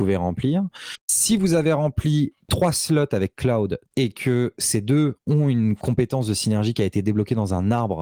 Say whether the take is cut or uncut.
cut